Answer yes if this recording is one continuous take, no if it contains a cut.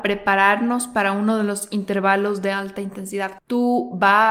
no